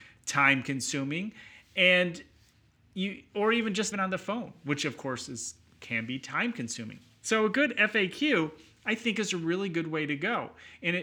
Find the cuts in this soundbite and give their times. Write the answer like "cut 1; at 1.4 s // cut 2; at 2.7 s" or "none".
cut 1; at 3.9 s